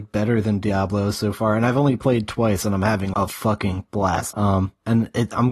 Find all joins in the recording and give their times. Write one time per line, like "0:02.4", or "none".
0:03.1
0:04.3